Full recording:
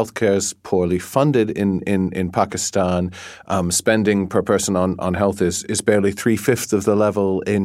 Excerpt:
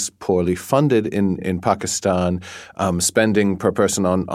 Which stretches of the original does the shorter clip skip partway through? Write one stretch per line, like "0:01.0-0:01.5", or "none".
0:01.8-0:02.1